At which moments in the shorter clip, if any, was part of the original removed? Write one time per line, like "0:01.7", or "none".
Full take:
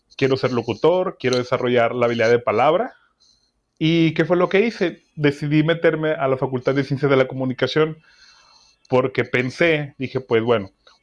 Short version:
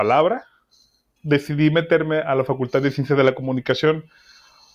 0:01.2